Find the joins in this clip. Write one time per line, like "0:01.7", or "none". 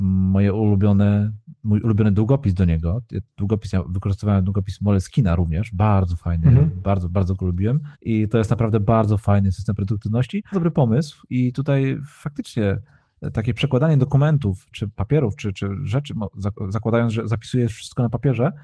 0:07.9
0:10.5
0:14.7